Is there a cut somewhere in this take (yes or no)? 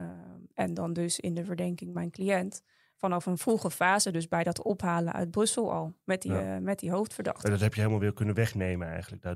no